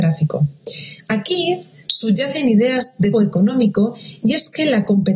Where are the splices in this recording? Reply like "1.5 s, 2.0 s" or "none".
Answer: 1.0 s, 3.1 s